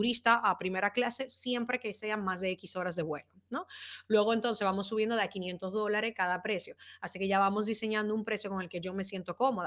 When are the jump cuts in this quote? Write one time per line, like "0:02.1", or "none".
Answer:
none